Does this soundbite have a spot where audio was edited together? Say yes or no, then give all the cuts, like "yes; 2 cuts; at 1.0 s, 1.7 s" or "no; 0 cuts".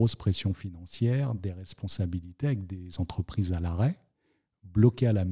no; 0 cuts